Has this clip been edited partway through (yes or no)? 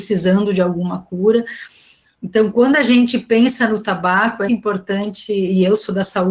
yes